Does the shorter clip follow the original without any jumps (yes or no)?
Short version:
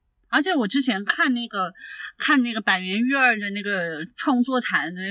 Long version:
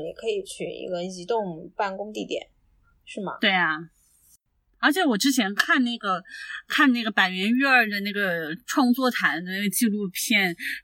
yes